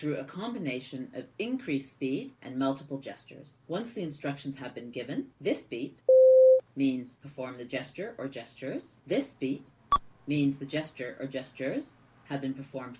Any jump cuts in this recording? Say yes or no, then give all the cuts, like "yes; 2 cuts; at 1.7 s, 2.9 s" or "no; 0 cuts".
no; 0 cuts